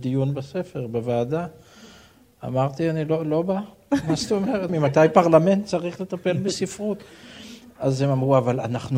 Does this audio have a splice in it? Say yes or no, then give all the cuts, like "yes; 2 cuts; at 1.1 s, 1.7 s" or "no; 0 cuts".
yes; 1 cut; at 4.7 s